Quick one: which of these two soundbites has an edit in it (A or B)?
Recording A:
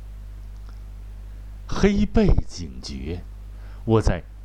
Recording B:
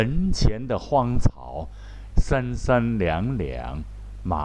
B